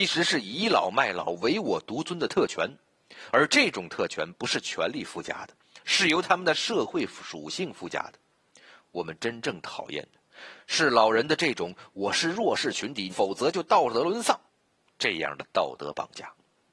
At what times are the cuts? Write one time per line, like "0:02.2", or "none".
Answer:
0:13.1
0:14.5